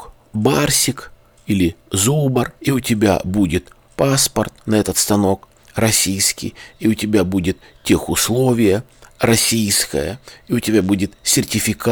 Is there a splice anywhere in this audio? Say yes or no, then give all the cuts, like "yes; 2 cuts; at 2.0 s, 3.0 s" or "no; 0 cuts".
yes; 1 cut; at 2.6 s